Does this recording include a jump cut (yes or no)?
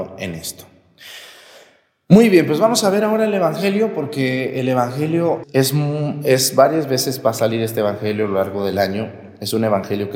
yes